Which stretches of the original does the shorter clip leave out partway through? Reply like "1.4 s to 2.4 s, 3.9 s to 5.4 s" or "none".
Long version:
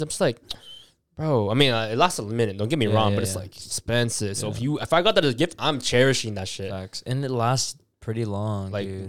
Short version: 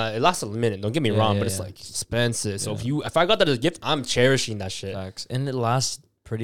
none